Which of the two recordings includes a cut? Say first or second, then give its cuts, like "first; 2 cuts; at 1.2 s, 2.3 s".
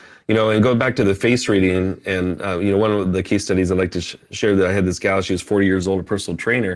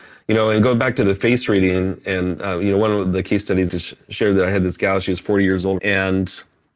second; 2 cuts; at 3.7 s, 5.8 s